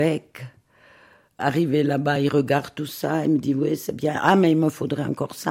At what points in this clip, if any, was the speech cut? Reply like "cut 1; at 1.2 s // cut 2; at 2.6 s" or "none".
none